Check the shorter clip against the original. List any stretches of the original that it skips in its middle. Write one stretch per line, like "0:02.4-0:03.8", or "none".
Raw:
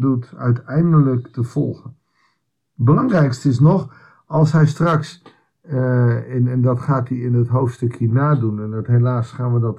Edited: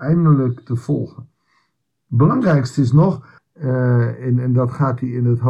0:04.1-0:05.5